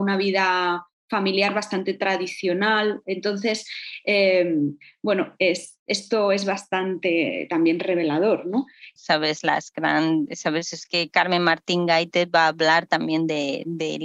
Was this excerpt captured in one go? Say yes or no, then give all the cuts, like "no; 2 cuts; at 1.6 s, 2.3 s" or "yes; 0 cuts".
no; 1 cut; at 9.0 s